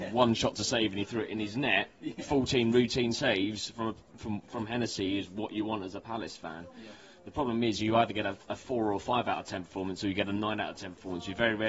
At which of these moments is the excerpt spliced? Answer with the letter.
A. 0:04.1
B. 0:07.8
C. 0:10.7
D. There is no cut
D